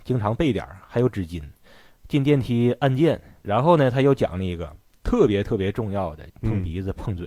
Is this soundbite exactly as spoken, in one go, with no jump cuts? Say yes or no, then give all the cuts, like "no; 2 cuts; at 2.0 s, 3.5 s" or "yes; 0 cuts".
no; 2 cuts; at 3.4 s, 6.3 s